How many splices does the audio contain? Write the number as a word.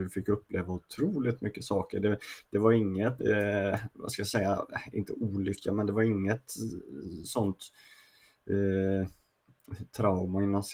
one